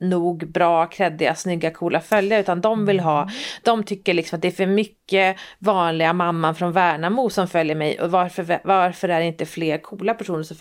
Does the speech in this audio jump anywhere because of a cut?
no; 0 cuts

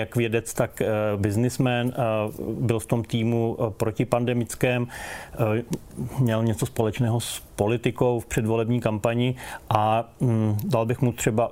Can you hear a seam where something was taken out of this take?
no; 0 cuts

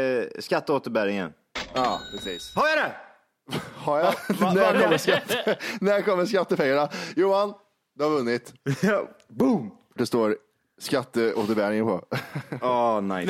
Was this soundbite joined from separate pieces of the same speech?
yes; 1 cut; at 10.0 s

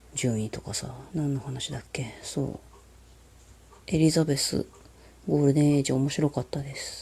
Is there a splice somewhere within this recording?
yes; 1 cut; at 1.1 s

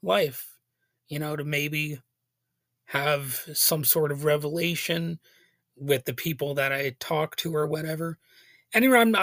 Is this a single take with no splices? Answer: yes; 0 cuts

